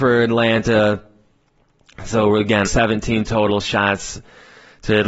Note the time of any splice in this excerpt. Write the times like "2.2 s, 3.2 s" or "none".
2.7 s